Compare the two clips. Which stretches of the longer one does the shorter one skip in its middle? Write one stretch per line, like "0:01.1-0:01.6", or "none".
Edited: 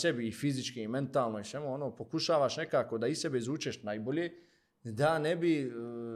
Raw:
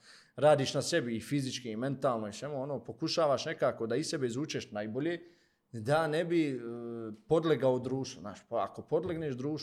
none